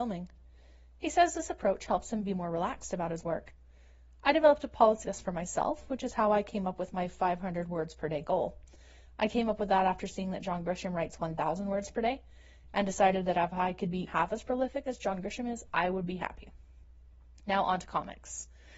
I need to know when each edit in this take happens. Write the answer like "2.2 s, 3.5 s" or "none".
5.0 s, 14.1 s